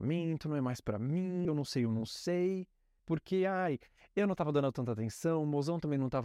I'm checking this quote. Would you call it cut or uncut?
cut